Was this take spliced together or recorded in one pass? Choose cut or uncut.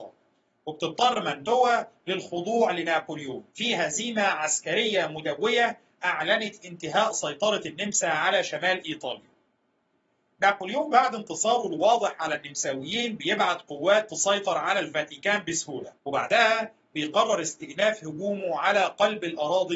cut